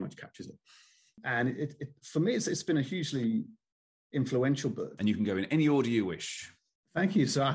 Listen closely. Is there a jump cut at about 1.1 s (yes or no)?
yes